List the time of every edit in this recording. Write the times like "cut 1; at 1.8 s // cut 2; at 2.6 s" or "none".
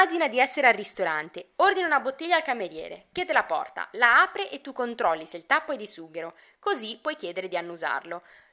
none